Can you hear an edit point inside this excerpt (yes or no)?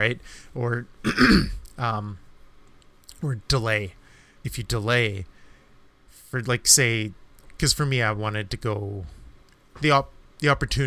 yes